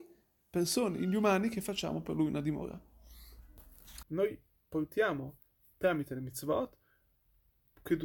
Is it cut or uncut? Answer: cut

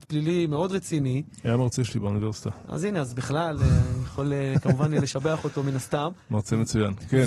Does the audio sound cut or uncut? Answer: uncut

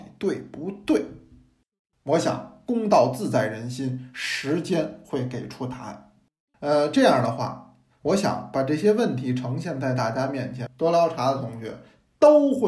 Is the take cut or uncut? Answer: cut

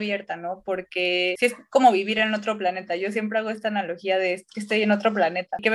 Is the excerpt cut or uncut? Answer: uncut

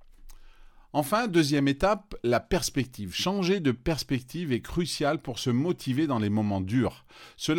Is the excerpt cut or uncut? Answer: uncut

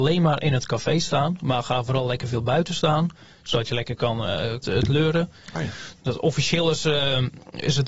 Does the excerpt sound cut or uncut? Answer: cut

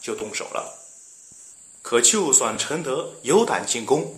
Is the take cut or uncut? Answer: uncut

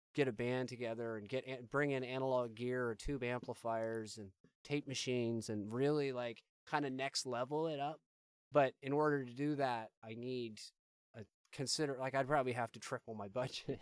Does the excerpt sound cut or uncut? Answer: uncut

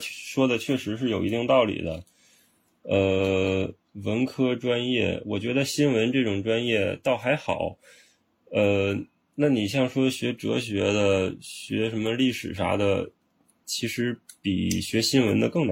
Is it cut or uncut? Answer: uncut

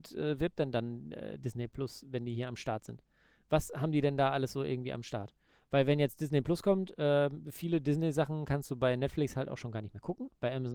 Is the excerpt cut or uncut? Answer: uncut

